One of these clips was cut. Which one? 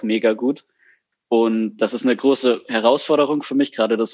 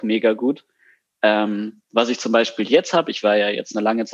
first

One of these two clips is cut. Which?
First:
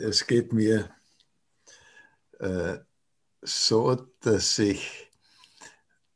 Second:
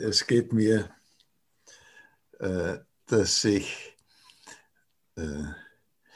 second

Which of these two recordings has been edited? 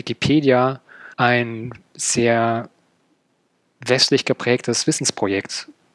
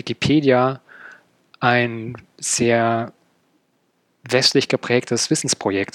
first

